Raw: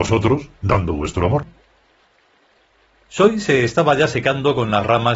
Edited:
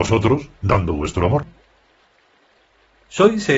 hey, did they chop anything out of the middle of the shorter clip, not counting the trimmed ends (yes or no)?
no